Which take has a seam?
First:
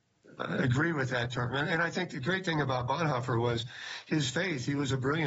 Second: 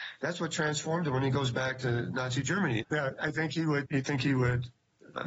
second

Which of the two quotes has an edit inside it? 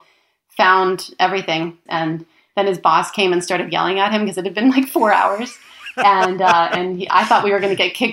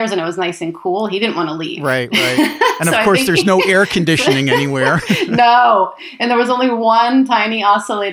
first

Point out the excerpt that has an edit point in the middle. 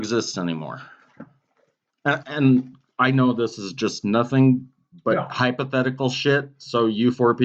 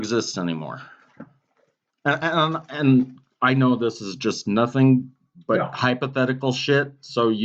first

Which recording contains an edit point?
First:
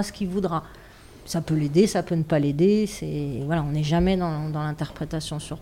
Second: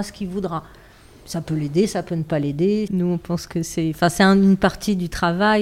second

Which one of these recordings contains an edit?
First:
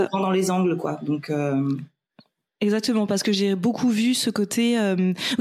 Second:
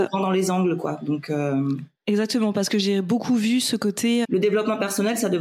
second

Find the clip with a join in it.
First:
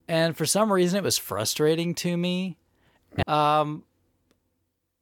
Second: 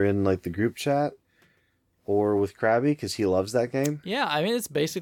first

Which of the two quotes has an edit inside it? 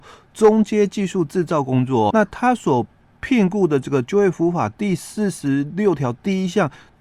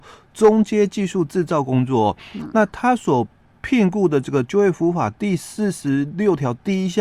first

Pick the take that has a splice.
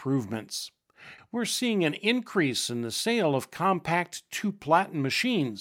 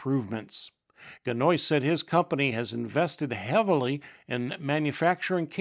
first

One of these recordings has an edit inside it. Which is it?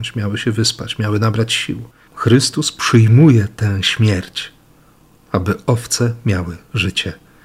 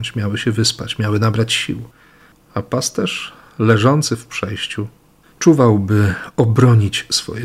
first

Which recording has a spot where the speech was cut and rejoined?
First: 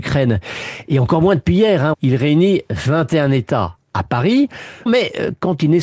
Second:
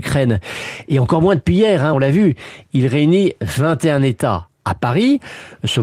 first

